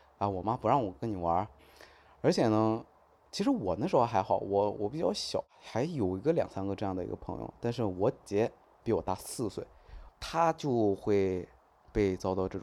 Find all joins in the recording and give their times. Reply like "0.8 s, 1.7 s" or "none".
8.2 s, 10.1 s